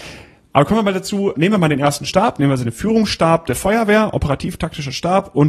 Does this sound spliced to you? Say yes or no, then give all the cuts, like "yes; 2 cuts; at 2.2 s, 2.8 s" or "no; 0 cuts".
yes; 1 cut; at 1.3 s